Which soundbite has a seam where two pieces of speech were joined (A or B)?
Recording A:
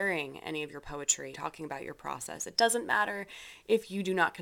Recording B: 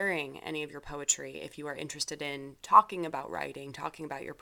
A